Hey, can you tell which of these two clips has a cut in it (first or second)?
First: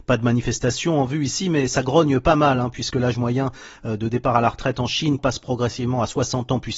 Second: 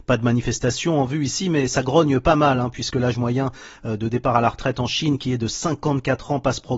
first